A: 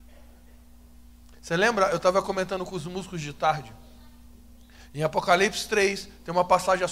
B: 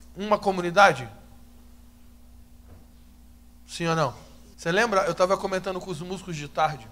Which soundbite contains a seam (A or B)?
B